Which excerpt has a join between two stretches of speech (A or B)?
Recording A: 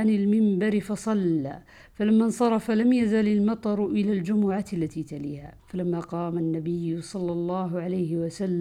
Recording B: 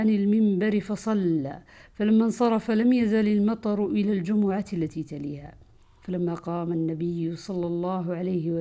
A